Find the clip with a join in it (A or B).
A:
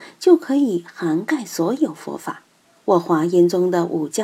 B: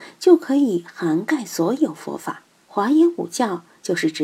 B